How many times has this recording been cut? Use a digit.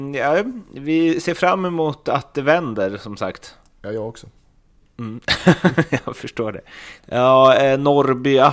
1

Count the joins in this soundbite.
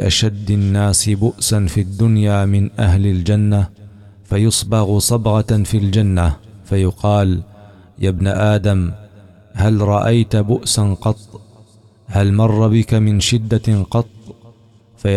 0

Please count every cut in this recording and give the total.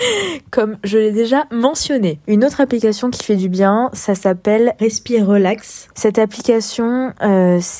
1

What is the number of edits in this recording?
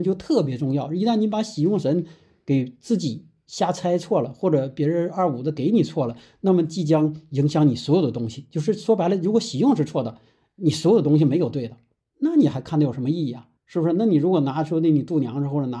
1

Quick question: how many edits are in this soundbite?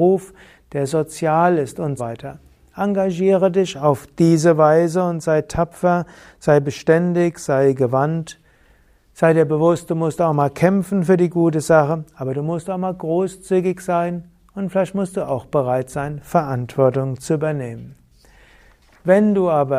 1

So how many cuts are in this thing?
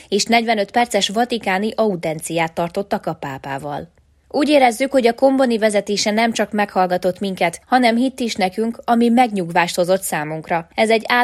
0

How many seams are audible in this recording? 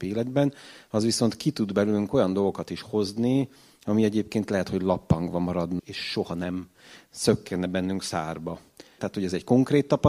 2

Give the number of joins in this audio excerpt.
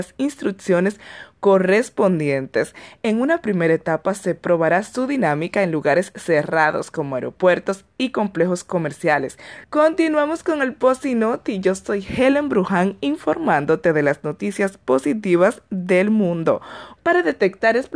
2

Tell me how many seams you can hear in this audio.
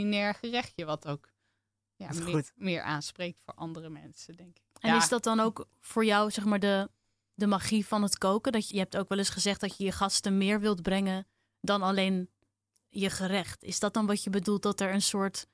1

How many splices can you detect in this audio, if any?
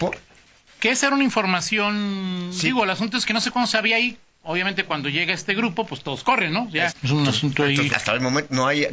2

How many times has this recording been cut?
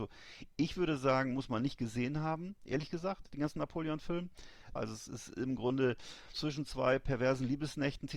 2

